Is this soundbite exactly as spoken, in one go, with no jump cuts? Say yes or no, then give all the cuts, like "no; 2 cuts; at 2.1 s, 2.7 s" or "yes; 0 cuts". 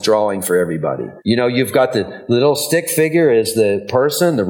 no; 1 cut; at 1.2 s